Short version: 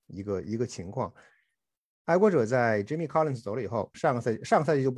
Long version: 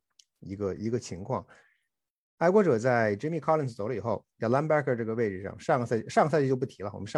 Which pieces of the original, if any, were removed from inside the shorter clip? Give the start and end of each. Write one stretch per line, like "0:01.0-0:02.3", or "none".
0:04.3-0:05.6